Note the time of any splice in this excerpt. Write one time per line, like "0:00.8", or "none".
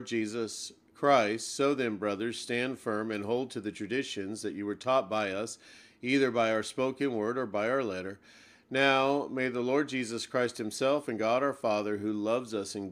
none